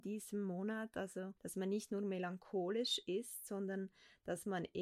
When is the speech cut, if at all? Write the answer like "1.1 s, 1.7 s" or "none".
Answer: 1.4 s